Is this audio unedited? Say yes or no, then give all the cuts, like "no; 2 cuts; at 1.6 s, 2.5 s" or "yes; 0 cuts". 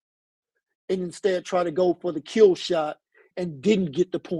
no; 1 cut; at 3.3 s